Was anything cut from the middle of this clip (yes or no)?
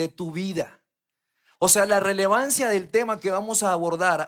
no